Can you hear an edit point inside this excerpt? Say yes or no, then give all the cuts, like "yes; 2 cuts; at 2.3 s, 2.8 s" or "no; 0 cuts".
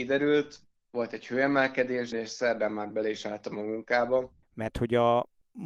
yes; 2 cuts; at 2.1 s, 4.4 s